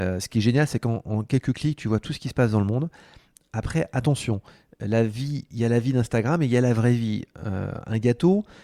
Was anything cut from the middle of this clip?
no; 0 cuts

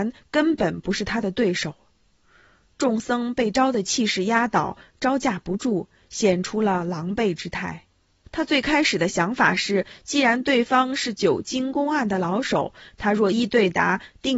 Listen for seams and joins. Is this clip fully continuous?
no; 2 cuts; at 8.2 s, 13.3 s

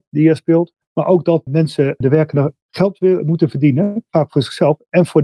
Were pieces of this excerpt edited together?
no; 0 cuts

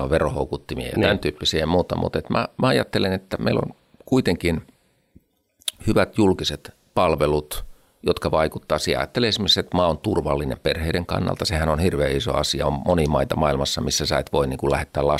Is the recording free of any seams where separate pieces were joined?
yes; 0 cuts

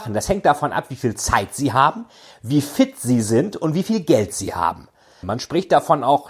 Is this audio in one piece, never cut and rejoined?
no; 1 cut; at 5.2 s

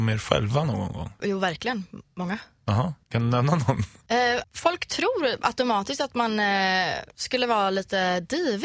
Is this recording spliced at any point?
yes; 2 cuts; at 3.0 s, 4.4 s

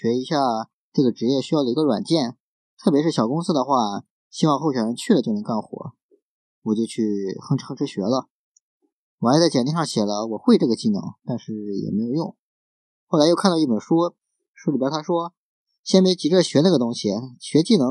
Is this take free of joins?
yes; 0 cuts

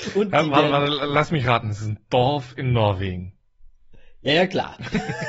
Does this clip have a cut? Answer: no; 0 cuts

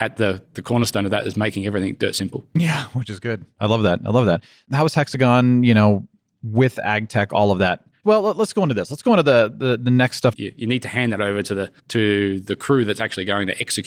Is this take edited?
yes; 3 cuts; at 8.0 s, 10.3 s, 11.8 s

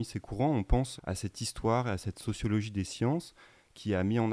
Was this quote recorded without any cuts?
no; 1 cut; at 1.0 s

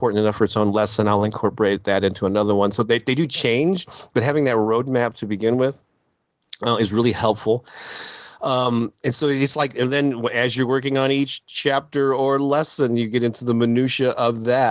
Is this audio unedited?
yes; 0 cuts

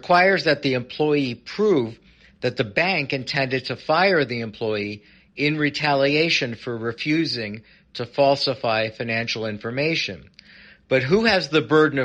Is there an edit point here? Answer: no; 0 cuts

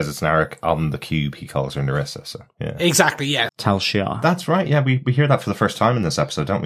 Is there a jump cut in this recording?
yes; 1 cut; at 3.5 s

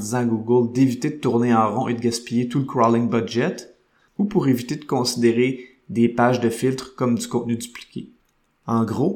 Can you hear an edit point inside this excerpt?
no; 0 cuts

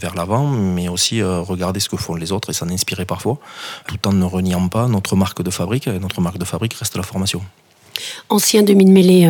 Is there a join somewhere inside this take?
no; 0 cuts

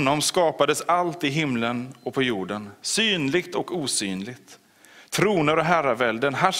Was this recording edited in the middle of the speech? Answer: no; 0 cuts

